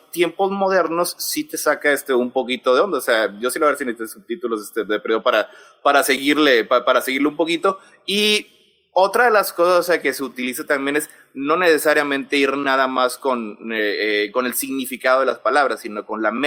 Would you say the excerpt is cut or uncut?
uncut